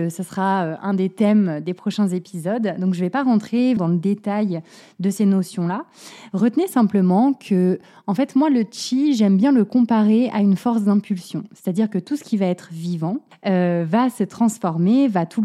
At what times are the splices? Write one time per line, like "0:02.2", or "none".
0:03.8
0:11.5